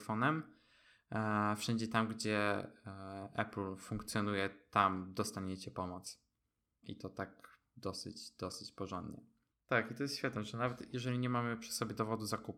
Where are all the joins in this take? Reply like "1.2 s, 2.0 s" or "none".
6.8 s, 9.5 s